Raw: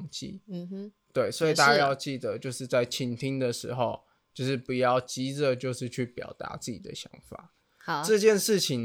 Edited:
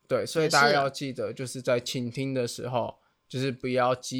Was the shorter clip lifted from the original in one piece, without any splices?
yes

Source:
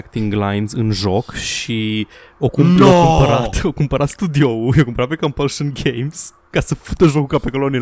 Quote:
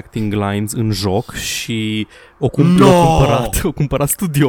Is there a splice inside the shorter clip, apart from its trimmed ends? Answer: no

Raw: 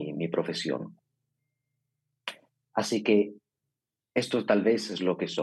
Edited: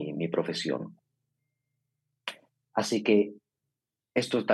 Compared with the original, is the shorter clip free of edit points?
yes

